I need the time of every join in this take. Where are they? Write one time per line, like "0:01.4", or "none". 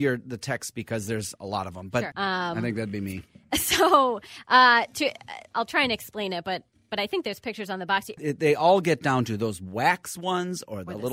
0:02.1
0:08.2